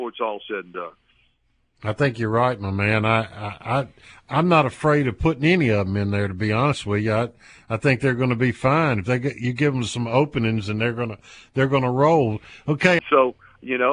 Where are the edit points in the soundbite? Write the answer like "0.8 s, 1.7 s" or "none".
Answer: 13.0 s